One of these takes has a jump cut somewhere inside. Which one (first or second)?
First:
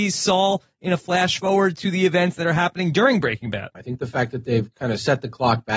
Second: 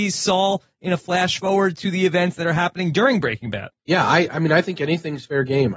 first